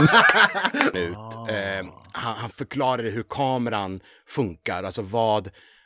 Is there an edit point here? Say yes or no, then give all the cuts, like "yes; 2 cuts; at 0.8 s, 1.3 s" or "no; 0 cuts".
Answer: yes; 1 cut; at 0.9 s